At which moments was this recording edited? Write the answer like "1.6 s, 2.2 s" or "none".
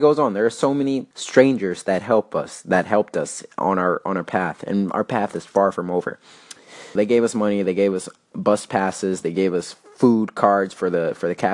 1.1 s, 7.0 s